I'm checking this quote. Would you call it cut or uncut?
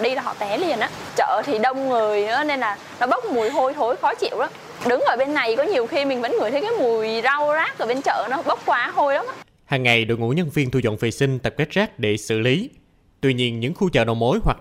uncut